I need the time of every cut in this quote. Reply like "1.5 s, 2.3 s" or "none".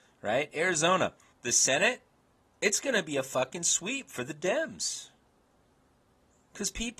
1.3 s

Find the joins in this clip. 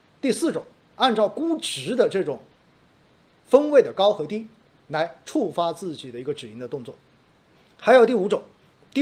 none

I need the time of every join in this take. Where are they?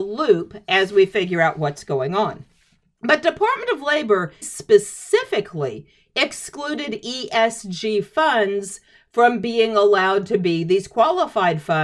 3.0 s, 4.4 s

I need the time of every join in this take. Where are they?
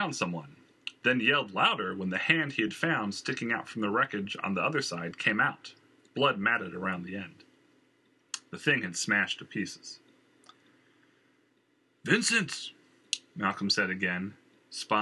6.1 s, 8.5 s

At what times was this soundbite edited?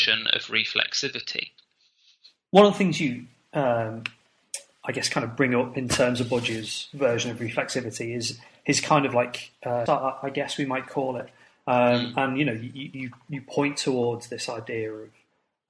9.9 s

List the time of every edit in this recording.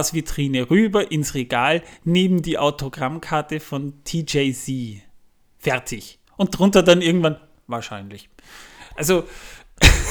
none

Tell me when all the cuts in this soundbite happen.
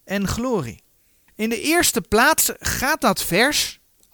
1.3 s

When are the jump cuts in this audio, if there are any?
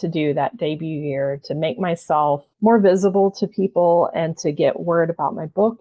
2.5 s

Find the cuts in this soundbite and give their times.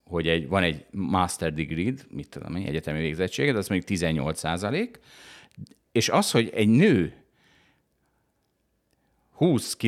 none

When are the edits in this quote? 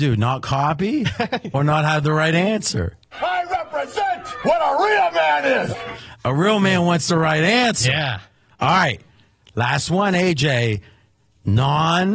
none

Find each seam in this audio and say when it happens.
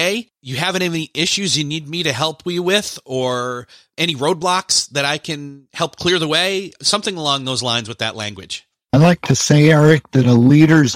none

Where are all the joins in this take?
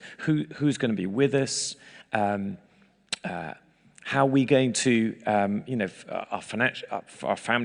none

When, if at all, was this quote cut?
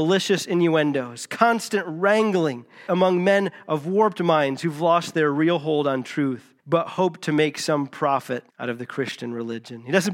2.9 s, 6.6 s, 8.5 s

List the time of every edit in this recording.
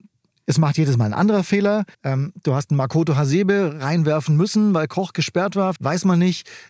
1.9 s, 5.8 s

